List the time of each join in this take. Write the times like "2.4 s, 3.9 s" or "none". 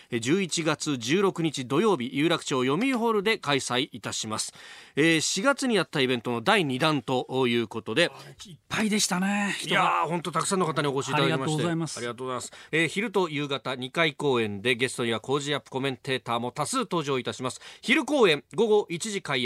12.7 s